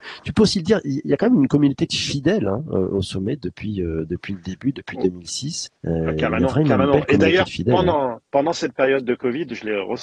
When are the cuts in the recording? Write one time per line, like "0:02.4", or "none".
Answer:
0:05.8